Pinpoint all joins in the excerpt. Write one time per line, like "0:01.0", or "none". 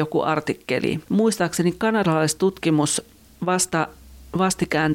0:01.0